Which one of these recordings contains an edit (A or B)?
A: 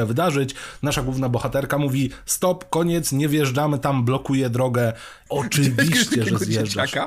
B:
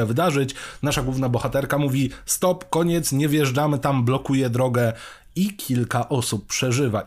A